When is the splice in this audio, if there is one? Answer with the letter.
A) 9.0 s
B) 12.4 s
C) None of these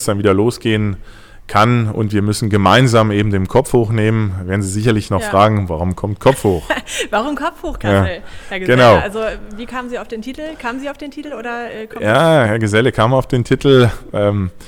B